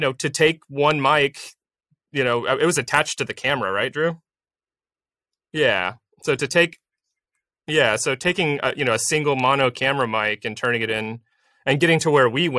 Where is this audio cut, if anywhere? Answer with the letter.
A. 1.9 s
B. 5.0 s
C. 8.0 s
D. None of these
D